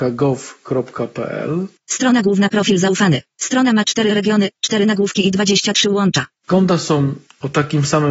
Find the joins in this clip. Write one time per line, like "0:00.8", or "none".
0:06.4